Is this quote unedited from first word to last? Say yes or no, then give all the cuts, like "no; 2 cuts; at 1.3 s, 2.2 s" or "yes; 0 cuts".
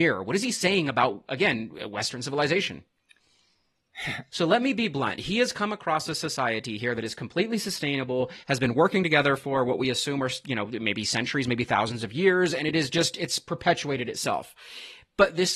no; 1 cut; at 4.3 s